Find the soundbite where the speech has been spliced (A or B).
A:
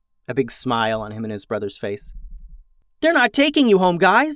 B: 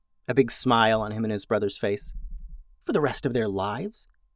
B